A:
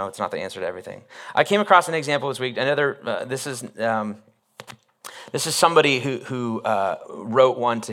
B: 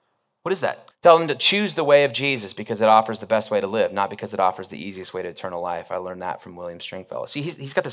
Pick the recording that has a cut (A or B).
B